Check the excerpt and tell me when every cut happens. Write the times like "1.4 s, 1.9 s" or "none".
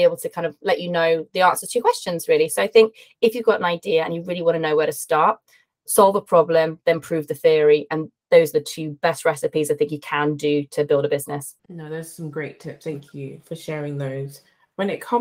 11.6 s